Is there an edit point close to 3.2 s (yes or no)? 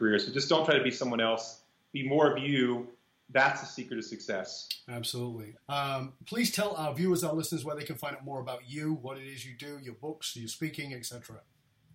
no